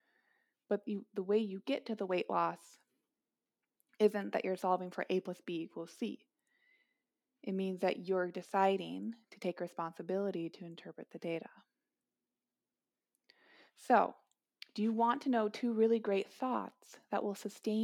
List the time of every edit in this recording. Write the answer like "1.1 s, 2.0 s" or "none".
none

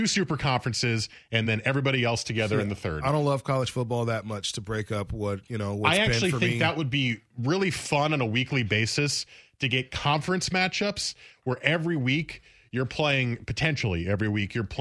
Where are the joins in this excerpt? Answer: none

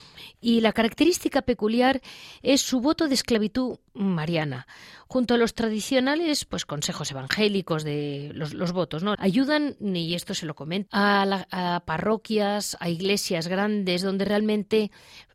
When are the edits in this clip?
9.1 s, 10.9 s

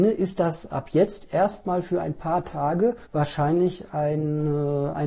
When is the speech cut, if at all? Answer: 3.0 s

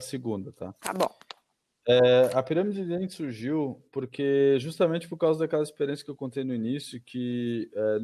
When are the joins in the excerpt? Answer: none

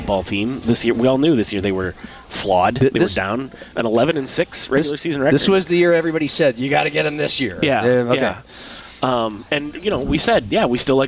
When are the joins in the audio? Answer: none

